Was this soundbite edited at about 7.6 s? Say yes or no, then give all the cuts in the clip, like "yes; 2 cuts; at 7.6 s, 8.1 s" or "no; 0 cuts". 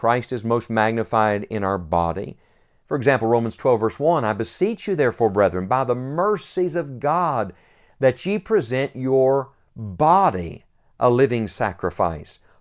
no; 1 cut; at 2.8 s